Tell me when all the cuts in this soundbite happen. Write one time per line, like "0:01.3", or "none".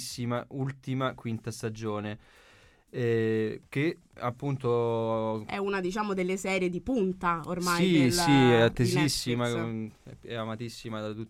none